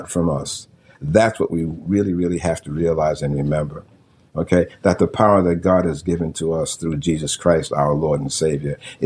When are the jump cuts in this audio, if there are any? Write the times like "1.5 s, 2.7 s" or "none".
0.9 s